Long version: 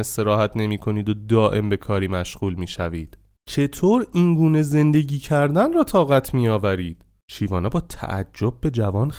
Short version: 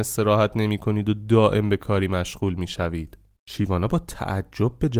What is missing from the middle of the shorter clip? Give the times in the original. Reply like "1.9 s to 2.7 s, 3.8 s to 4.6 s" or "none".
3.4 s to 7.2 s